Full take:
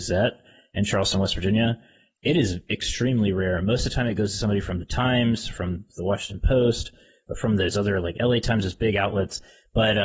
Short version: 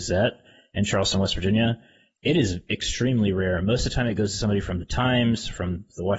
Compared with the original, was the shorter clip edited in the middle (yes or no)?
no